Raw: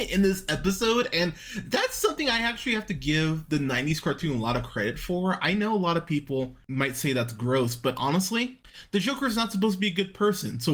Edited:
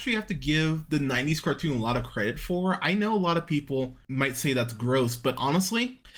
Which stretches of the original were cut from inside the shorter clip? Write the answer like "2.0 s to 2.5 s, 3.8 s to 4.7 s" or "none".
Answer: none